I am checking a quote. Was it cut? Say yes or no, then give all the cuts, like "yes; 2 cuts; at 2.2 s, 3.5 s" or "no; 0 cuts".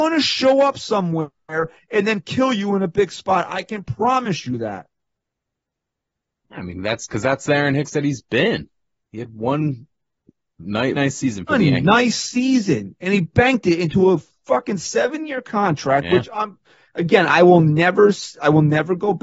yes; 1 cut; at 10.9 s